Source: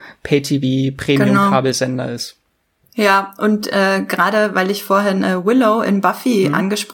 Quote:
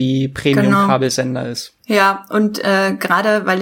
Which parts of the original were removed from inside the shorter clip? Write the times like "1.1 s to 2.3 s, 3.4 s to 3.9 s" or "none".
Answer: 2.4 s to 2.9 s